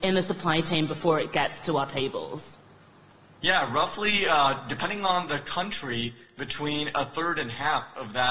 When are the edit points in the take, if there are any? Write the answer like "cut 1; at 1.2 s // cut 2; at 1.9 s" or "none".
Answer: none

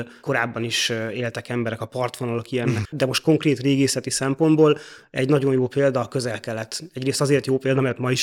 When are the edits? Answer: cut 1; at 2.8 s

